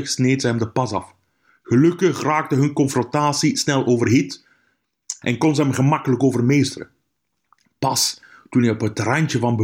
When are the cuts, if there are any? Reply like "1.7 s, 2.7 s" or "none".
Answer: 5.2 s